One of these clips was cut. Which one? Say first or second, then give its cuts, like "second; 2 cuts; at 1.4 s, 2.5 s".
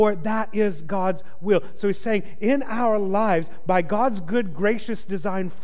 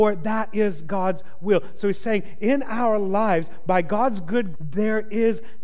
second; 1 cut; at 4.5 s